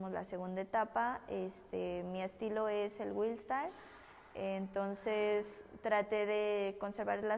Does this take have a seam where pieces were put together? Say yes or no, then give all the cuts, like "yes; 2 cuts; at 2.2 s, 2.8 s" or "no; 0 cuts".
no; 0 cuts